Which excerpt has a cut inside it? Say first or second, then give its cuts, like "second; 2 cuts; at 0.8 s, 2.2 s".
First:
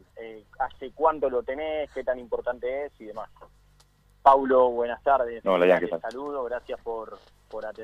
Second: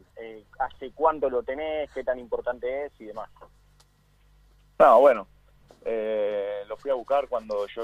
first; 2 cuts; at 4.0 s, 5.4 s